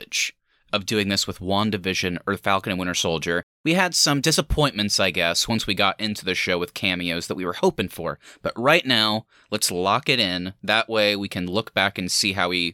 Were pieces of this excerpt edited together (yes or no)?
no